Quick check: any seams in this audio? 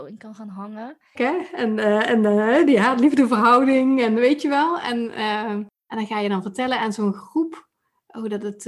yes; 1 cut; at 1.1 s

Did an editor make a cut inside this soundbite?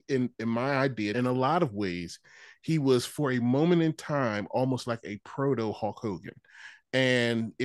yes; 1 cut; at 1.1 s

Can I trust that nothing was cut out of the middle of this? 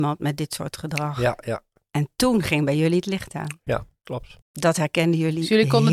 no; 1 cut; at 4.4 s

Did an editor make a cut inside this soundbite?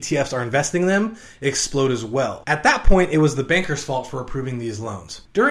yes; 1 cut; at 2.4 s

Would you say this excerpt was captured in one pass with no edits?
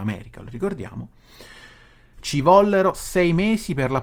no; 1 cut; at 2.1 s

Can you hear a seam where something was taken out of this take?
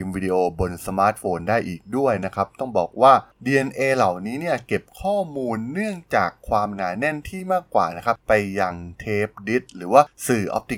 no; 0 cuts

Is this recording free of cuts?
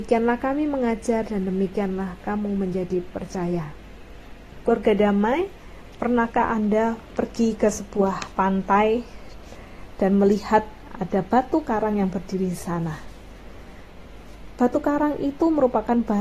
no; 1 cut; at 4.6 s

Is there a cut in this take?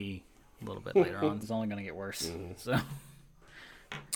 yes; 1 cut; at 1.4 s

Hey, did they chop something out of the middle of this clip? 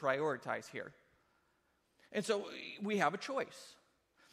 no; 0 cuts

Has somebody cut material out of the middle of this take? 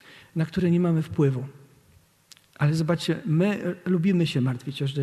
no; 0 cuts

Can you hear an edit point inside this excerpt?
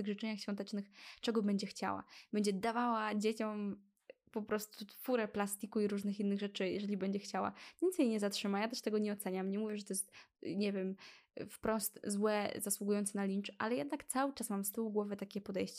no; 0 cuts

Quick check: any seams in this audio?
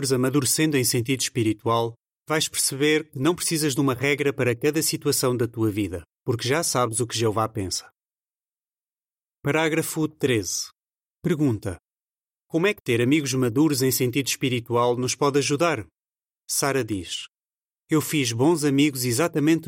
yes; 1 cut; at 16.3 s

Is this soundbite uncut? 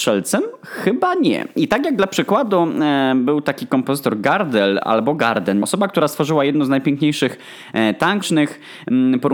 no; 2 cuts; at 5.6 s, 8.2 s

